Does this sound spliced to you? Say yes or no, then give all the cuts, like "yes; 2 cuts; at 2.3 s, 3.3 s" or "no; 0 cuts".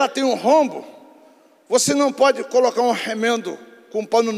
no; 0 cuts